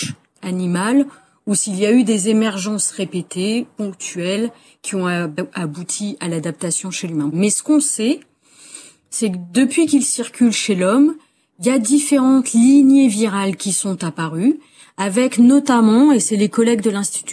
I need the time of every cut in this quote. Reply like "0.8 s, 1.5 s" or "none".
7.3 s